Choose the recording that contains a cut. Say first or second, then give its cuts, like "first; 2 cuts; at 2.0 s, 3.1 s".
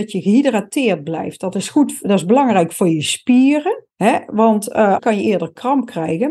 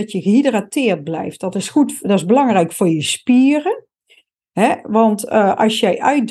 first; 2 cuts; at 3.9 s, 5.0 s